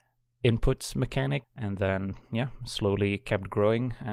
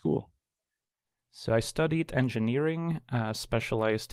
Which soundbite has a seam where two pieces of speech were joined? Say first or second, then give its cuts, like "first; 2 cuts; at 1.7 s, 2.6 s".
first; 1 cut; at 1.4 s